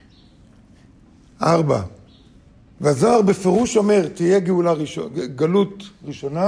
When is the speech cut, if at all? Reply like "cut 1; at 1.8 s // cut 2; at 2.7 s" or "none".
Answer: none